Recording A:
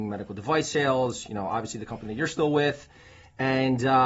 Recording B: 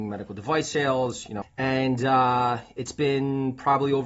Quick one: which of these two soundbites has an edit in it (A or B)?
B